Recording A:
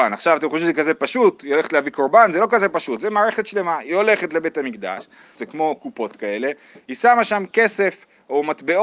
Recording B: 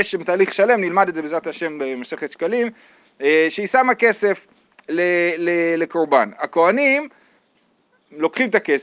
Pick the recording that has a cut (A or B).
A